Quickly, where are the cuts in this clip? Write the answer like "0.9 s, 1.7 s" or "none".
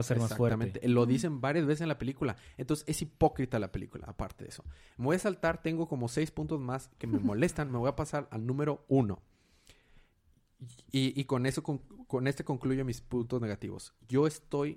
none